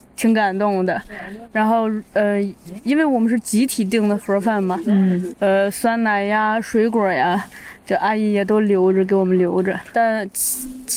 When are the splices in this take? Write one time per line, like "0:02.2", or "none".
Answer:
0:05.3
0:09.9